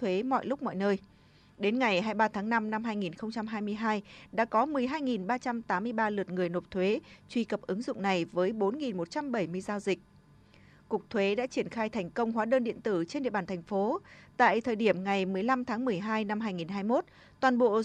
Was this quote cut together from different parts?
no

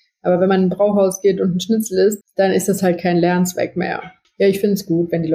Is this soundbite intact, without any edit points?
no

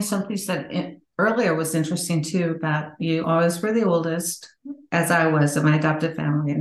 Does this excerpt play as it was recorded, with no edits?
yes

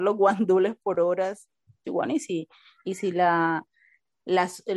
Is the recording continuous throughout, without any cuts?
no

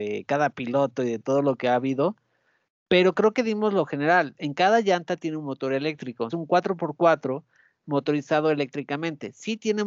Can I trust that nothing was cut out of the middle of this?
no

